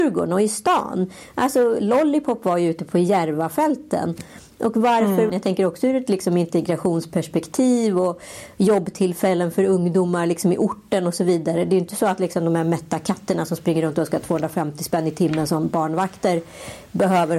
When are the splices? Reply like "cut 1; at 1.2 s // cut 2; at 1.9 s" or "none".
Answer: cut 1; at 5.3 s